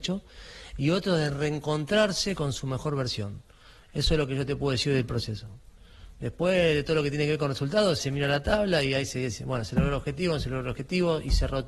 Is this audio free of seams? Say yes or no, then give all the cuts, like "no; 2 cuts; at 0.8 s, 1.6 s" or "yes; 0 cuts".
no; 1 cut; at 8.0 s